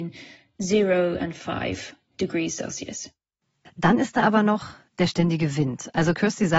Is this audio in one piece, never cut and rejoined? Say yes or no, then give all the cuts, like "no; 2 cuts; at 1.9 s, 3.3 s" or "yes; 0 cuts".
no; 1 cut; at 3.7 s